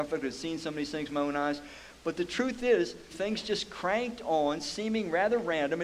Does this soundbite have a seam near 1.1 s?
no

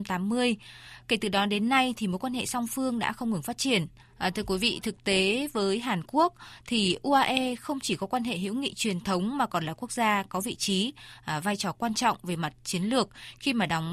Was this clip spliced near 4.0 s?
yes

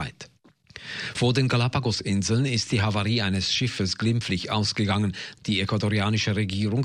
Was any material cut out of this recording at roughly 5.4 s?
yes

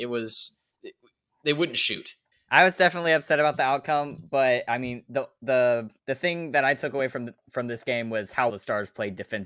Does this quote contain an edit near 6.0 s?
yes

